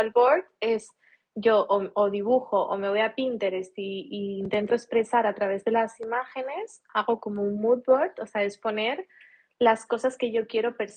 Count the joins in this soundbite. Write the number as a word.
zero